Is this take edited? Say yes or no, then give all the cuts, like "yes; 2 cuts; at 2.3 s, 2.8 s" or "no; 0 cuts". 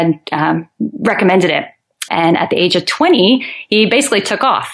yes; 1 cut; at 2.1 s